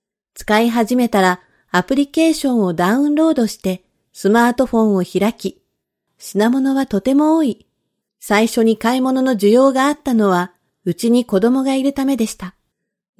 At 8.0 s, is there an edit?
yes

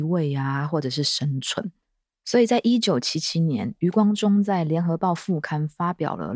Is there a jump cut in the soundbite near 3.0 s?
no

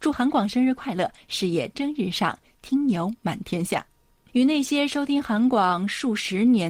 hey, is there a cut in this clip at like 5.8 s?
no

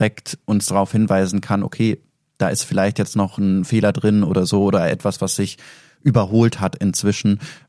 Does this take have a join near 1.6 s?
no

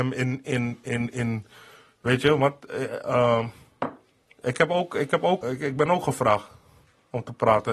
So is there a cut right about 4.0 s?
no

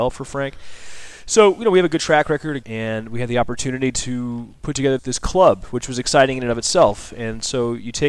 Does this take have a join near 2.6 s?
yes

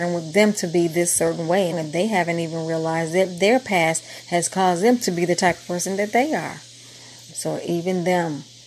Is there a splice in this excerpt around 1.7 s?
yes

